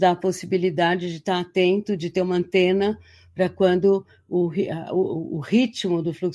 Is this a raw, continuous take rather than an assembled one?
yes; 0 cuts

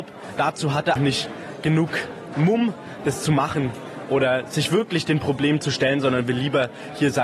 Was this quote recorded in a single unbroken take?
no; 1 cut; at 1.0 s

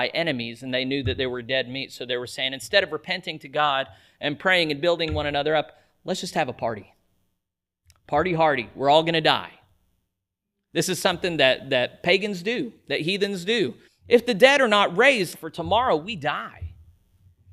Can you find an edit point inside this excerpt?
yes; 2 cuts; at 13.9 s, 15.3 s

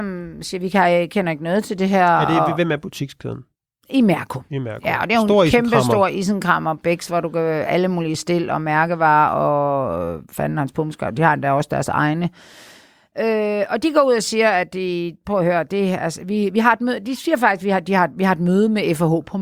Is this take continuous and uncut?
yes; 0 cuts

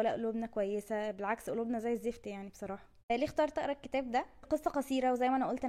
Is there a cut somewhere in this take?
yes; 1 cut; at 3.0 s

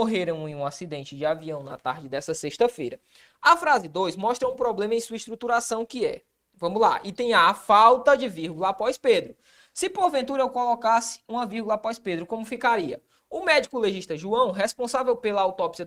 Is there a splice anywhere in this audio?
no; 0 cuts

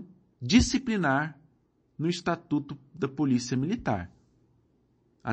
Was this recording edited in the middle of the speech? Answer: no; 0 cuts

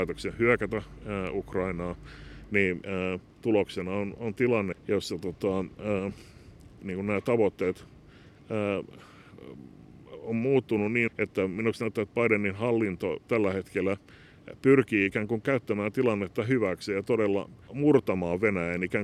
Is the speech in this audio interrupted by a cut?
yes; 3 cuts; at 4.7 s, 11.1 s, 17.7 s

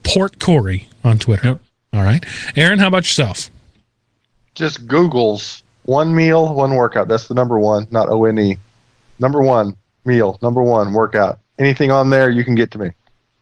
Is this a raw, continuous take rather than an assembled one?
yes; 0 cuts

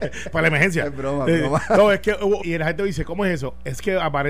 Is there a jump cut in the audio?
yes; 1 cut; at 2.4 s

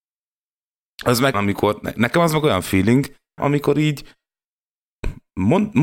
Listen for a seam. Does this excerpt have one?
yes; 2 cuts; at 1.3 s, 3.4 s

